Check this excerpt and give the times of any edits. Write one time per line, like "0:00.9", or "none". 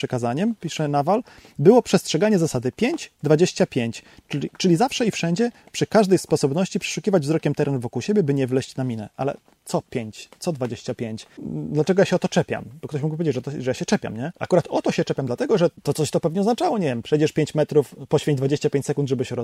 none